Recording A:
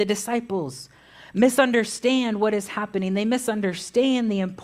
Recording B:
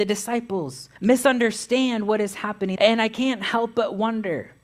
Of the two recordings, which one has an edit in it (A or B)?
B